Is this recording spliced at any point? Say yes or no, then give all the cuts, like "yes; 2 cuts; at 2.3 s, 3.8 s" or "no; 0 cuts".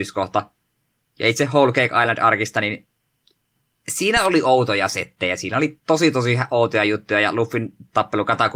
no; 0 cuts